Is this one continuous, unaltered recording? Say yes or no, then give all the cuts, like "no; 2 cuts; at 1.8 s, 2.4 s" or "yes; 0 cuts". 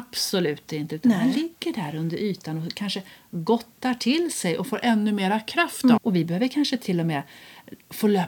no; 1 cut; at 6.0 s